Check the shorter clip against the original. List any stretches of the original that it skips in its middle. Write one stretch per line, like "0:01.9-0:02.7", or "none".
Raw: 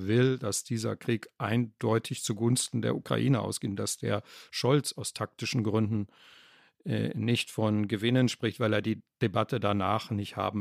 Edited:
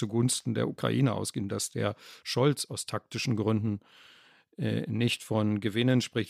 none

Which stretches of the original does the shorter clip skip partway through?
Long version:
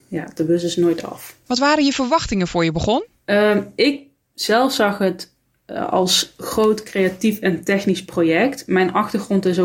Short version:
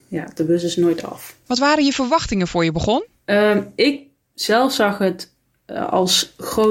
none

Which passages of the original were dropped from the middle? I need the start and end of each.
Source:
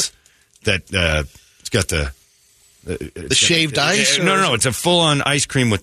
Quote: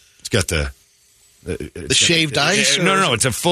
none

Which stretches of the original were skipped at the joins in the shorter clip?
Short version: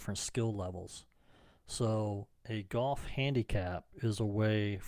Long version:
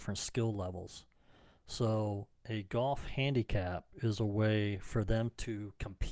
none

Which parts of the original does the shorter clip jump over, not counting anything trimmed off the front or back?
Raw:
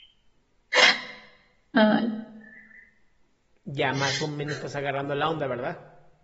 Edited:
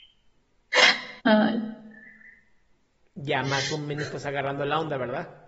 0:01.2-0:01.7

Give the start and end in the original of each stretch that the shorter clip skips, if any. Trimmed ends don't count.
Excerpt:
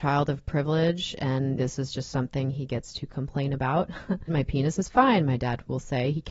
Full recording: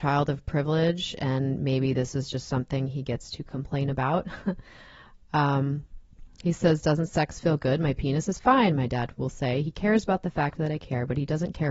0:01.6-0:01.9
0:04.6-0:07.8

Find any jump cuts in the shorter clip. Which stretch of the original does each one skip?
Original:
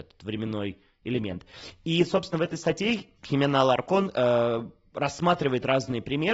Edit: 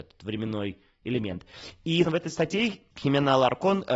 0:02.0-0:02.3

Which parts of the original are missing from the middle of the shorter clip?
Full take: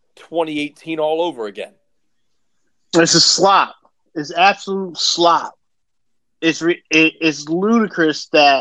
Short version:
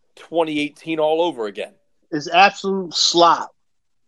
0:02.0-0:04.0

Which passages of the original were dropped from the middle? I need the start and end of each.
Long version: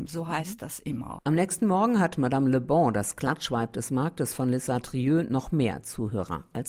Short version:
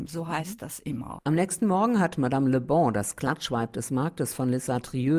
none

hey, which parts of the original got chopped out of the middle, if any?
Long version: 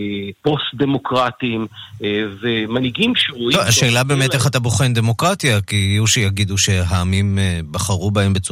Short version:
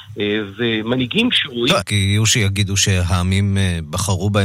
0:03.6-0:05.6

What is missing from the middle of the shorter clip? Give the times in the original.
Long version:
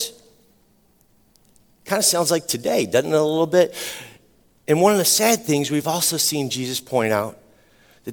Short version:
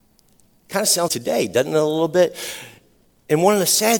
0:02.2-0:02.5

